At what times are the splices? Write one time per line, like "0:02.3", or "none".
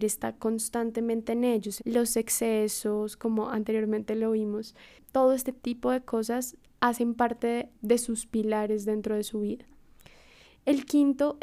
0:01.8
0:07.7